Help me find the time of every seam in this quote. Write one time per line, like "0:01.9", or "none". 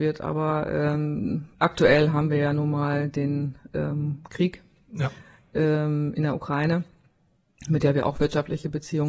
0:01.5
0:06.1